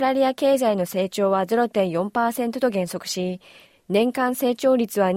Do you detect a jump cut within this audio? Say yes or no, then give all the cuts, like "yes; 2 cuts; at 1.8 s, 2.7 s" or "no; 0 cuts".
no; 0 cuts